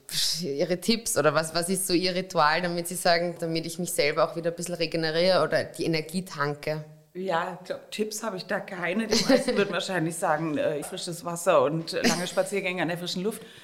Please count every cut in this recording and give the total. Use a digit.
2